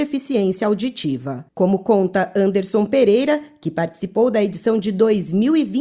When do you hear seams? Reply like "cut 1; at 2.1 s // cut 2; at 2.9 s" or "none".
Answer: cut 1; at 1.5 s